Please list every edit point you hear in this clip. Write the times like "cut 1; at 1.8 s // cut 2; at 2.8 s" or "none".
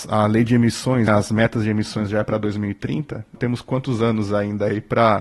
cut 1; at 1.1 s // cut 2; at 3.4 s